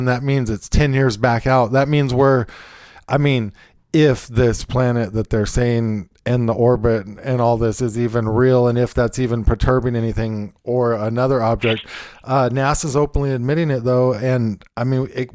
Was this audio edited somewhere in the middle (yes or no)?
no